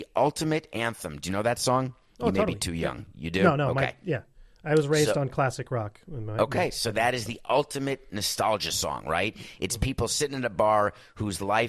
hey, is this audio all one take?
yes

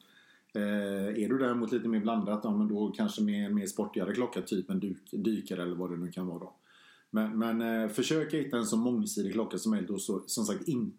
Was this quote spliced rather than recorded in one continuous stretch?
no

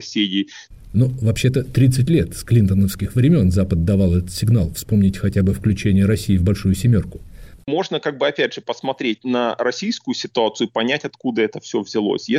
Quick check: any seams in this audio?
no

